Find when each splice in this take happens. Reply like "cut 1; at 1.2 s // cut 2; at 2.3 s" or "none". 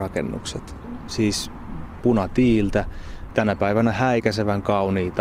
cut 1; at 3.3 s